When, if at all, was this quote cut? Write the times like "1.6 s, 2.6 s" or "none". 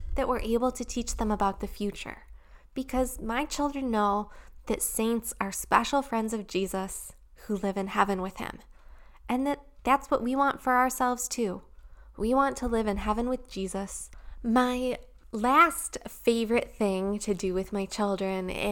none